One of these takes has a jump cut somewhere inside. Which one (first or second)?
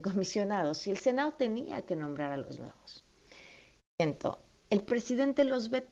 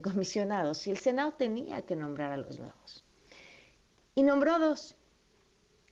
first